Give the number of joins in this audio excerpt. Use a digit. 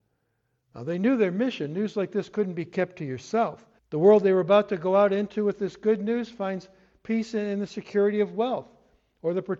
1